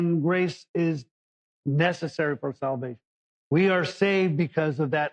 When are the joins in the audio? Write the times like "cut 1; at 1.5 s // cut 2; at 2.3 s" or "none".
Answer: cut 1; at 3.3 s